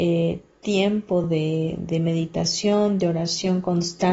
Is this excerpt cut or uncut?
uncut